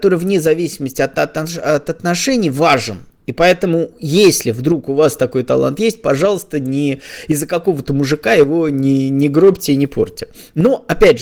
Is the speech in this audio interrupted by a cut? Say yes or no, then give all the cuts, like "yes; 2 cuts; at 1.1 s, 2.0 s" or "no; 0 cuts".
no; 0 cuts